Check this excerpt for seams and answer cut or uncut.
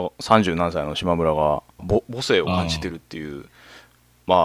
cut